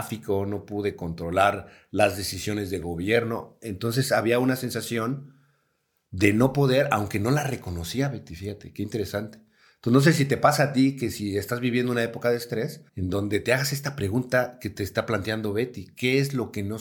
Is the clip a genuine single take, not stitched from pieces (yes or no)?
no